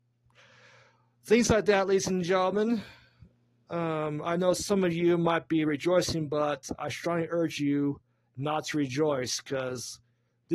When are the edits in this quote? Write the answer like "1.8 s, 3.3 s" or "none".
none